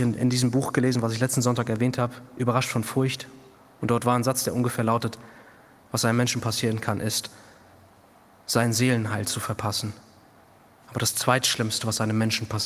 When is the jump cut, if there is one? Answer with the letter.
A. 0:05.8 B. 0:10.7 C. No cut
A